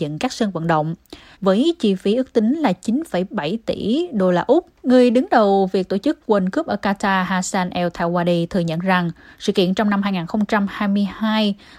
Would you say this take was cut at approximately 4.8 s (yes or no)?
yes